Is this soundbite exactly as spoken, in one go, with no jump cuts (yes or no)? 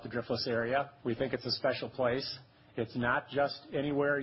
no